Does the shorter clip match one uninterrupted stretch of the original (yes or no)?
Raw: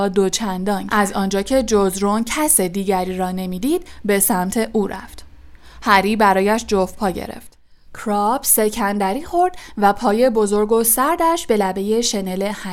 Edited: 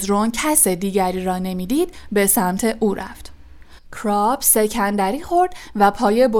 no